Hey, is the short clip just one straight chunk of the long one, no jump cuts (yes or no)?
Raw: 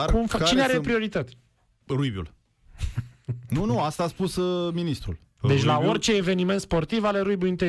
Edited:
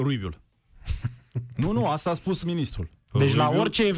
no